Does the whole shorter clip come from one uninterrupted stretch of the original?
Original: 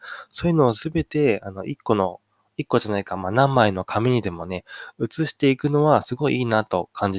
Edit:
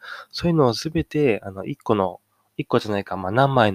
yes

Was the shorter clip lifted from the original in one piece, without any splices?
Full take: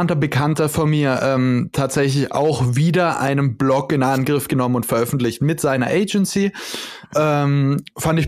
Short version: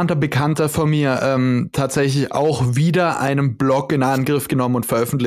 yes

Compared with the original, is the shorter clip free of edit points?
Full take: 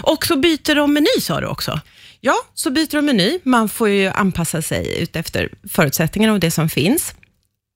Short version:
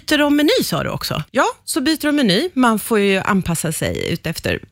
no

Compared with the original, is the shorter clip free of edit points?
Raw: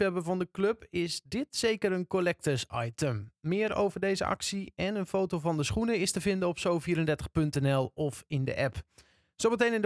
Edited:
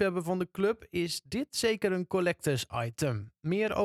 yes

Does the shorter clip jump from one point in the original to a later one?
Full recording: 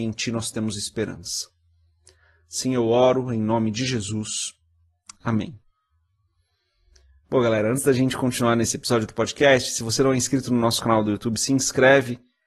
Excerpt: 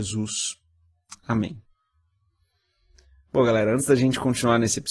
no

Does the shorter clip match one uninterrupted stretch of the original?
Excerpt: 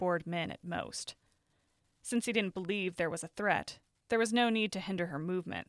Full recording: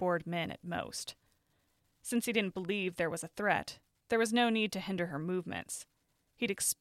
yes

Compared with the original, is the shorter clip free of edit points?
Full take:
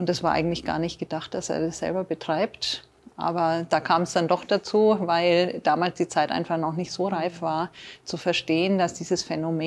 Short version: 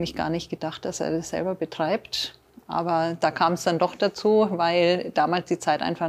yes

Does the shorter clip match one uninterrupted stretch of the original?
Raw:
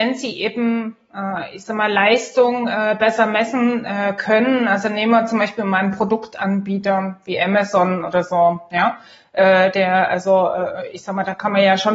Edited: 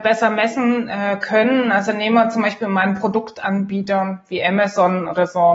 yes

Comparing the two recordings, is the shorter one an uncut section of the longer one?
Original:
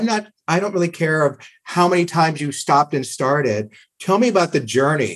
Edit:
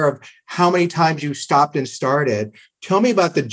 yes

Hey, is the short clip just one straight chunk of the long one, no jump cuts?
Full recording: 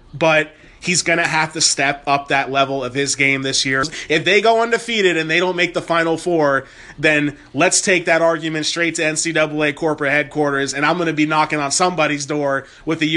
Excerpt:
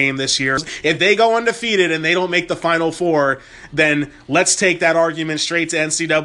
yes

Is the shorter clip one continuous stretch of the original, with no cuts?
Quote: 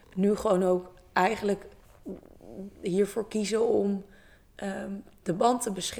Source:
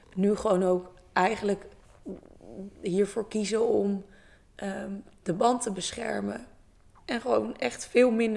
yes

